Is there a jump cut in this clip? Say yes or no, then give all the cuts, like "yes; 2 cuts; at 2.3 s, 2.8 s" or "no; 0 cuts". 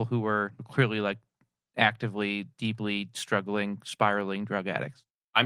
no; 0 cuts